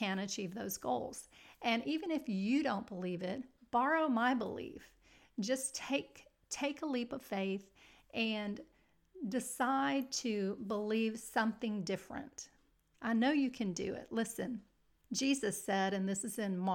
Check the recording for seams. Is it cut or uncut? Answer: uncut